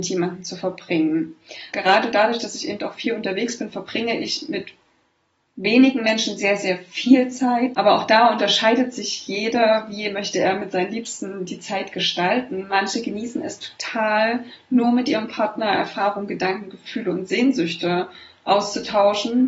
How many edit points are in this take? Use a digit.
2